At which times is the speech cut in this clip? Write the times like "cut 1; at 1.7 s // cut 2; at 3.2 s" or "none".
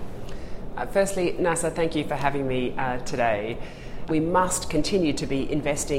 cut 1; at 4.1 s